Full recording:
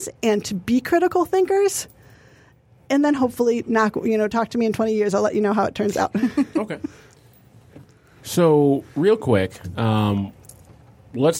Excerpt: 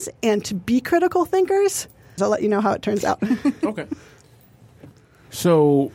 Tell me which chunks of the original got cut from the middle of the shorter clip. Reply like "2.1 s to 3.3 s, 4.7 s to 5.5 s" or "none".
2.2 s to 5.1 s